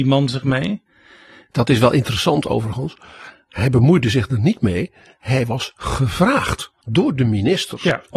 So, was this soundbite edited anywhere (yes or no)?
yes